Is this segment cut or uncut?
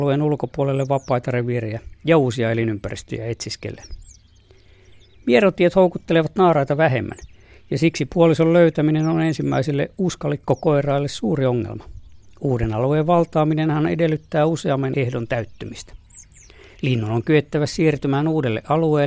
uncut